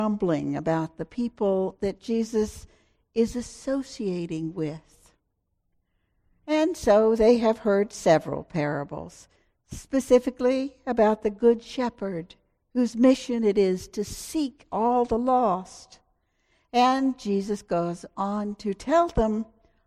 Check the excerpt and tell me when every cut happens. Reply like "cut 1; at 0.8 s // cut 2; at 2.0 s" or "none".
none